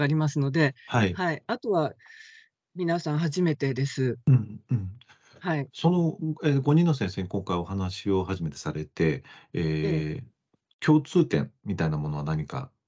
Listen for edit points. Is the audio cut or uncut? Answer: uncut